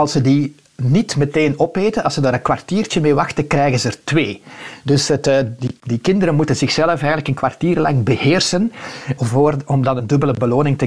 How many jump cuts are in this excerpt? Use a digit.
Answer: 1